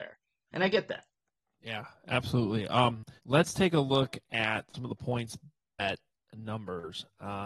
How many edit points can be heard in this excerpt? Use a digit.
1